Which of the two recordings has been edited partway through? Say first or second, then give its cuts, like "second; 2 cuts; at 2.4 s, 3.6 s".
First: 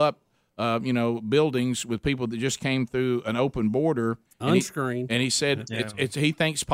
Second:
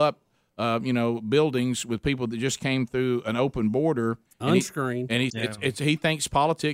second; 1 cut; at 5.3 s